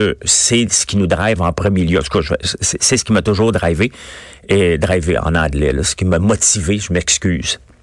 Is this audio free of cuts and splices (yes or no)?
yes